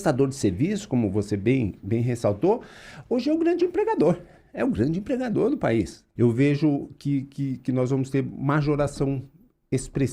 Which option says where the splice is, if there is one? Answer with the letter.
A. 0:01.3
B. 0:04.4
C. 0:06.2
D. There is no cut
C